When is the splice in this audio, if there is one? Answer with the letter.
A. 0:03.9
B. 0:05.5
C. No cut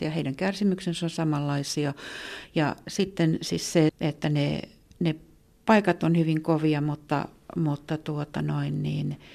A